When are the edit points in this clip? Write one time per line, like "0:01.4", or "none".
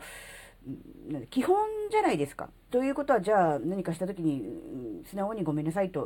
0:02.7